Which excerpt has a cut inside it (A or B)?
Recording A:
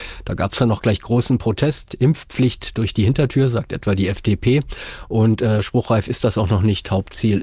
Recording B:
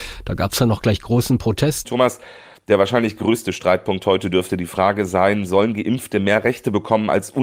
B